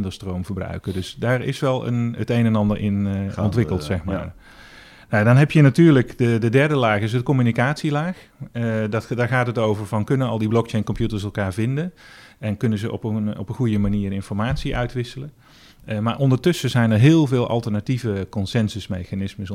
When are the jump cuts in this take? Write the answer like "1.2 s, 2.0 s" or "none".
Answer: 15.7 s